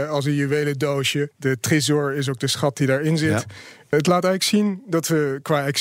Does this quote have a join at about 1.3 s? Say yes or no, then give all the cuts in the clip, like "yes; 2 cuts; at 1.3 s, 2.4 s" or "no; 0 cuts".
no; 0 cuts